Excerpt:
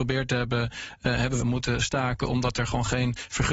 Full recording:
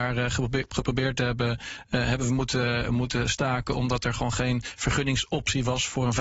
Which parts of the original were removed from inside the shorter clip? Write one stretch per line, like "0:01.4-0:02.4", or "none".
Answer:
0:02.3-0:02.9